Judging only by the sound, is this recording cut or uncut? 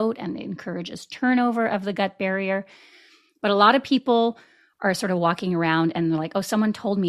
uncut